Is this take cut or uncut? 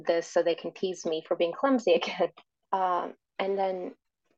cut